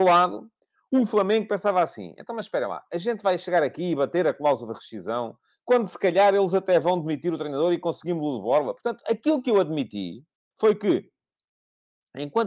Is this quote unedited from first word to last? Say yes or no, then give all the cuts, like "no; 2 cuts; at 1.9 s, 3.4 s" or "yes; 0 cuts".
no; 1 cut; at 10.5 s